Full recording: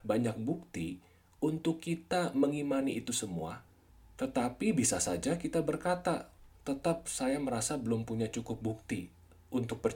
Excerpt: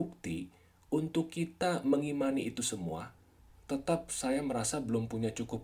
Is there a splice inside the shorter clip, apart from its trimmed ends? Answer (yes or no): yes